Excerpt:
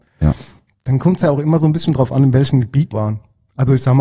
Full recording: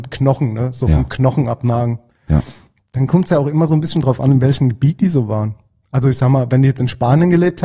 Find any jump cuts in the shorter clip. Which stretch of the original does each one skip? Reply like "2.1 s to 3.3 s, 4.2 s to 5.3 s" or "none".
5.0 s to 5.3 s